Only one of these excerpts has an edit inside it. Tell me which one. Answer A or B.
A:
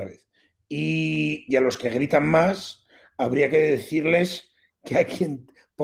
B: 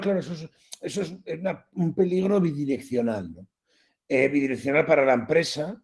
A